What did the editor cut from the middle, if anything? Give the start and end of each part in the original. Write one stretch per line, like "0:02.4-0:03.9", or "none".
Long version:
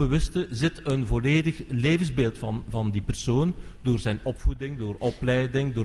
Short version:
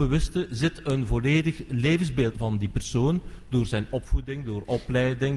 0:02.3-0:02.7